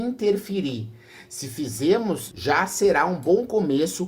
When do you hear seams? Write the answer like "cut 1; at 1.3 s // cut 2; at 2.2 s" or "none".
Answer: cut 1; at 2.3 s